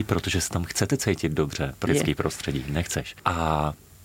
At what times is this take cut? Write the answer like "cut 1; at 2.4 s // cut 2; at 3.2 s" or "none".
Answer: cut 1; at 1.9 s